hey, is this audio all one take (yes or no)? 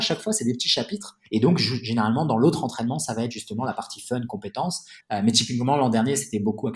no